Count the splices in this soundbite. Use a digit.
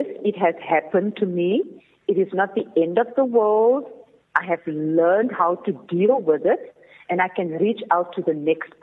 0